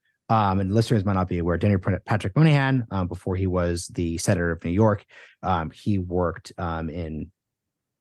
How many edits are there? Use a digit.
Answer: 0